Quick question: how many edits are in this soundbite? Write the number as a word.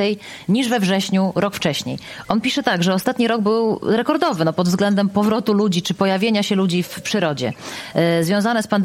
one